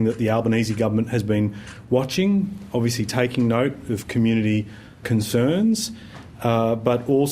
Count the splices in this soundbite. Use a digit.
1